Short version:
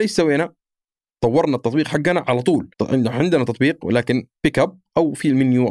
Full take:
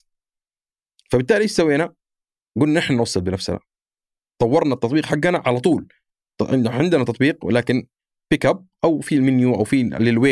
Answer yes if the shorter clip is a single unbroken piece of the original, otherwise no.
no